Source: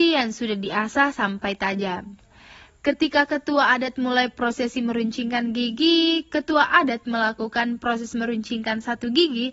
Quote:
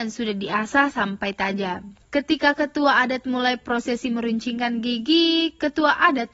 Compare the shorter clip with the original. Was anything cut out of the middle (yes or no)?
yes